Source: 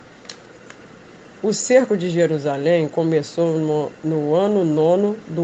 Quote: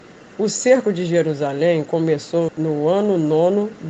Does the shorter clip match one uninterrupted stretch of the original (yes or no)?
no